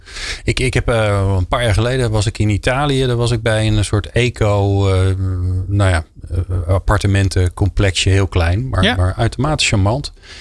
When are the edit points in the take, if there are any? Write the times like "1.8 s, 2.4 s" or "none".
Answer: none